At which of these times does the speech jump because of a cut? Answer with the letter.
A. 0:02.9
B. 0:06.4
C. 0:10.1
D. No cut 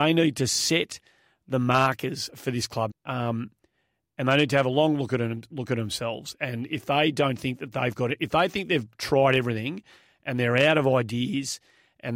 A